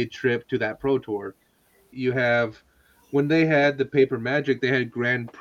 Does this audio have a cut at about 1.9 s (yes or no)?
yes